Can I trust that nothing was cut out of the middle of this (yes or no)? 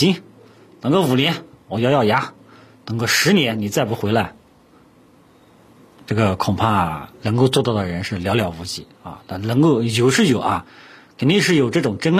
yes